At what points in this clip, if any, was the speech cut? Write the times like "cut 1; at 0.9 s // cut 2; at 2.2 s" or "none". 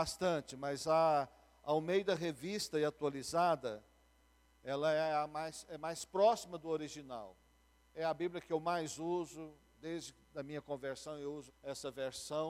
cut 1; at 11.5 s